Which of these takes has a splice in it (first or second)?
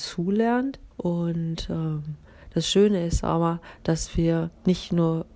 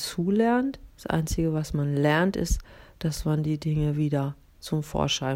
first